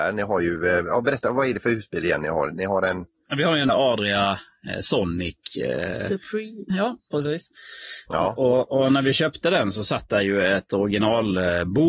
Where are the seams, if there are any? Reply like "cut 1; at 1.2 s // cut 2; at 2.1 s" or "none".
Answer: cut 1; at 3.7 s // cut 2; at 6.7 s